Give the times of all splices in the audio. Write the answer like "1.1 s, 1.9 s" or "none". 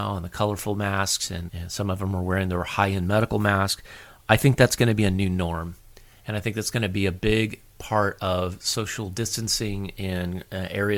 1.5 s